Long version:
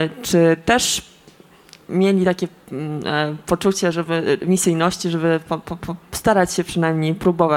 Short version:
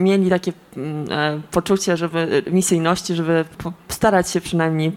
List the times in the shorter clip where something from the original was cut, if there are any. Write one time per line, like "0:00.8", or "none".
0:03.5